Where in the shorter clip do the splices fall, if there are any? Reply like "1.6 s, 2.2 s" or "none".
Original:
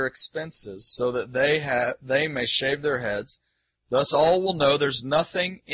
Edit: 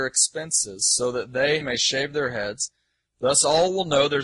1.6 s